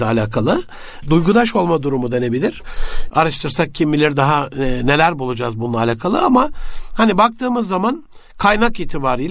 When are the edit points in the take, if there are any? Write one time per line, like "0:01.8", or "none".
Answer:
0:01.0
0:03.1